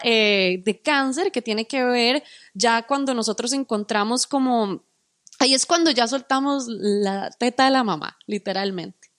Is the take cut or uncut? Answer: uncut